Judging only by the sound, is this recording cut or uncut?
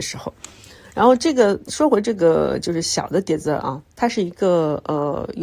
uncut